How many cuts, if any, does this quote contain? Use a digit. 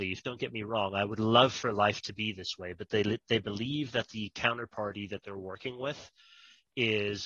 0